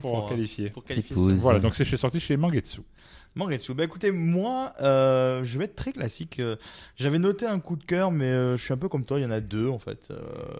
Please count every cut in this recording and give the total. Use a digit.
0